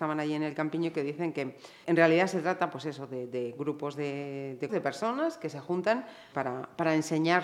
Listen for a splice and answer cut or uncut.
cut